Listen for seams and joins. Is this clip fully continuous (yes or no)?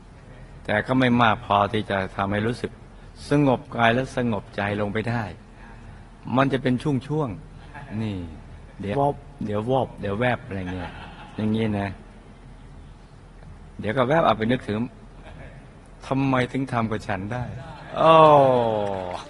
no